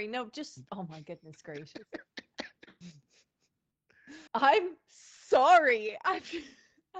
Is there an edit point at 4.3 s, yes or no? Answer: yes